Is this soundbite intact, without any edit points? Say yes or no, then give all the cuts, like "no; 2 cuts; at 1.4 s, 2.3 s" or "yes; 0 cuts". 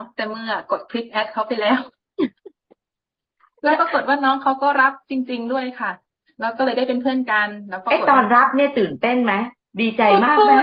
yes; 0 cuts